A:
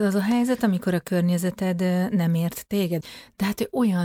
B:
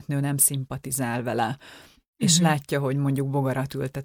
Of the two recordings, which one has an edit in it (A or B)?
A